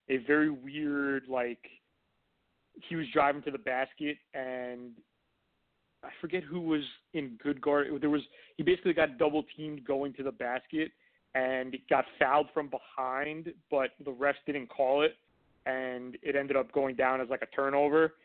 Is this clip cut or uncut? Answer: uncut